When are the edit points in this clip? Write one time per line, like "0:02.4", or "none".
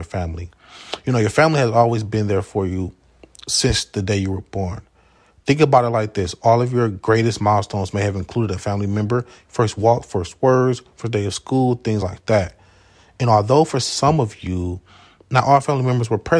none